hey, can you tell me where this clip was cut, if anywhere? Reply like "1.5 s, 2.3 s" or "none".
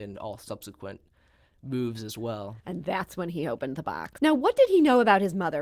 2.6 s, 4.2 s